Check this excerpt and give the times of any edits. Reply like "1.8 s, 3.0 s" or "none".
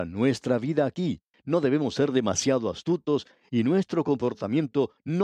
1.3 s